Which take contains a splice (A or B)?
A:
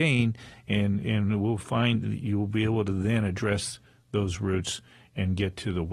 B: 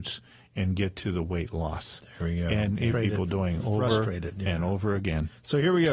B